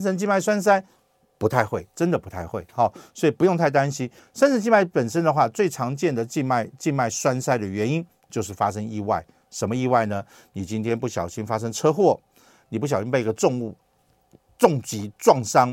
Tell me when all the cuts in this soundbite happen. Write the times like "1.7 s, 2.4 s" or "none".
4.2 s